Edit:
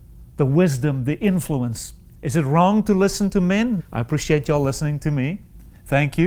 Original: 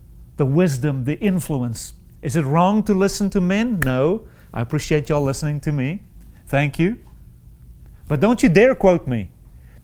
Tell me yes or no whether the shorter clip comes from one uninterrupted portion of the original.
no